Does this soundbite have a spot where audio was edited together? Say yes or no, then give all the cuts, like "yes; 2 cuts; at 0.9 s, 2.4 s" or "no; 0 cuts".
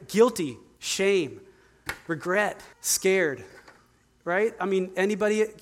yes; 1 cut; at 2.7 s